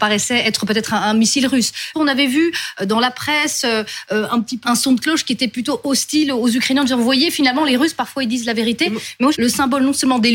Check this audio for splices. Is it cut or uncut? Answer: cut